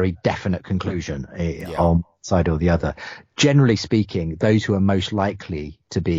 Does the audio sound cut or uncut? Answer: uncut